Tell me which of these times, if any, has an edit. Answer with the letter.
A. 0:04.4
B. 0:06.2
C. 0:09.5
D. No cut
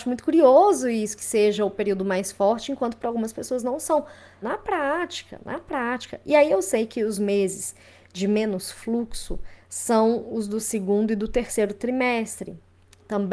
A